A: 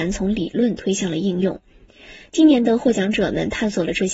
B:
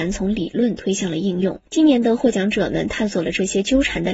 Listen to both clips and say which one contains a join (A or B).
B